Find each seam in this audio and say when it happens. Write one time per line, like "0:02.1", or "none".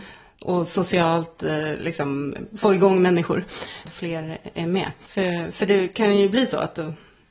0:02.5
0:03.9